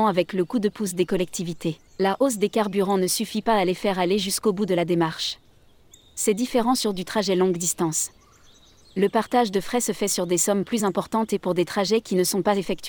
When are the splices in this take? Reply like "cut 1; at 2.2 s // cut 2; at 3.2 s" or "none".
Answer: cut 1; at 1.9 s